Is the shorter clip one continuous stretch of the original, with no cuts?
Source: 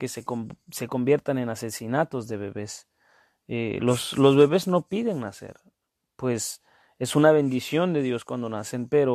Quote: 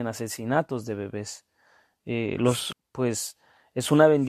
no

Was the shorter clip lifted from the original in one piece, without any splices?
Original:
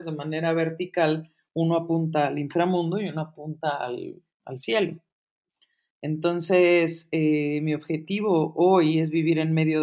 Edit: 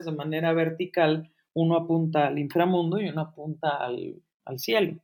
yes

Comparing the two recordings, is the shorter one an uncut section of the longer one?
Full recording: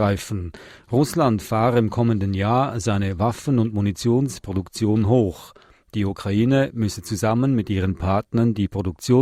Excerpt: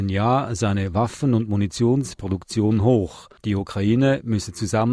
no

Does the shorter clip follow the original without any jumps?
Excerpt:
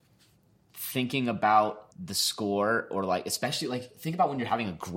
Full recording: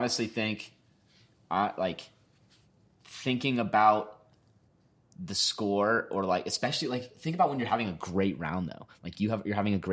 no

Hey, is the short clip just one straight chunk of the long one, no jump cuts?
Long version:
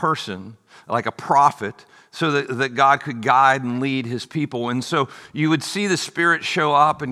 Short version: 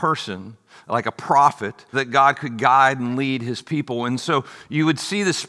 no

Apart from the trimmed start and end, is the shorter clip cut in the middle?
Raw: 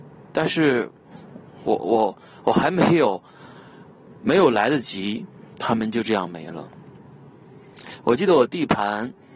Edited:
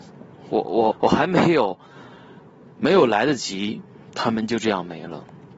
yes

